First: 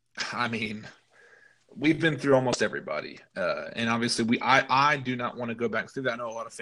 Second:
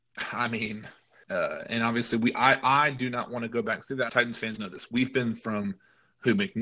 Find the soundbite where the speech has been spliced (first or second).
second